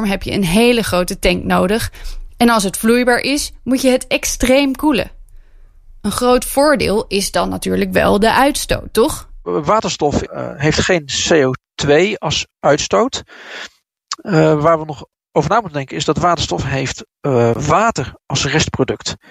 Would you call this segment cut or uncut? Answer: uncut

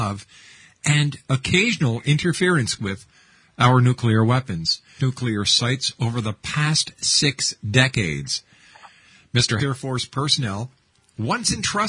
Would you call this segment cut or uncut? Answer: cut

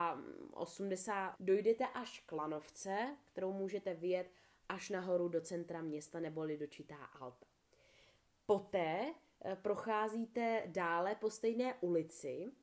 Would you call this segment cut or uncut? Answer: cut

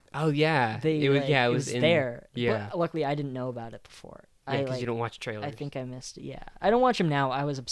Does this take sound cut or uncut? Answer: uncut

